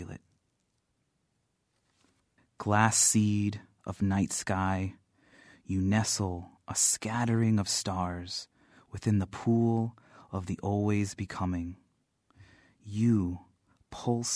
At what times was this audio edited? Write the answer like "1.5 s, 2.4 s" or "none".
2.4 s

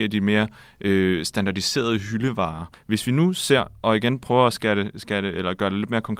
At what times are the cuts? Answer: 2.7 s

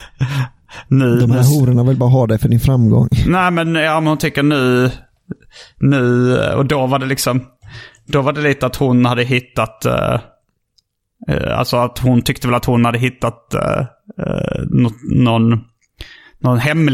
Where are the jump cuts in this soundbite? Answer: none

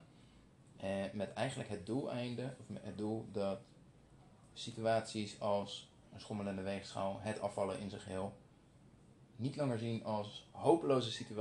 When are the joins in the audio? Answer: none

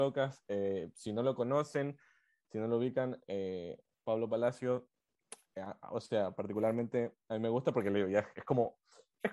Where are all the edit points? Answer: none

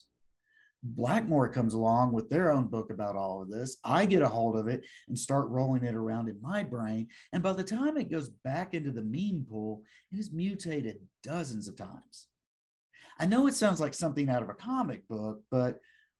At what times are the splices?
none

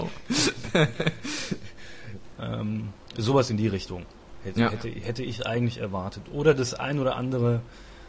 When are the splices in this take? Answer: 2.3 s

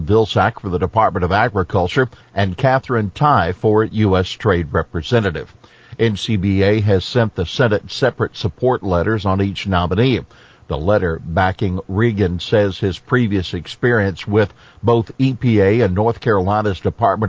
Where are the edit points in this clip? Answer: 2.2 s

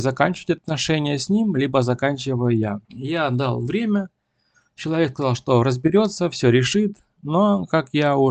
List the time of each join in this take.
2.8 s

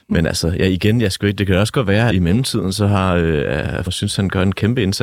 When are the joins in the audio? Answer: 2.1 s, 3.9 s

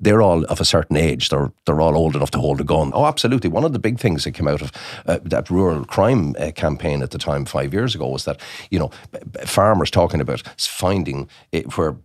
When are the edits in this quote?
2.9 s

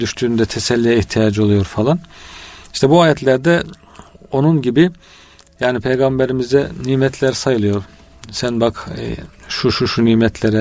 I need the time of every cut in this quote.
none

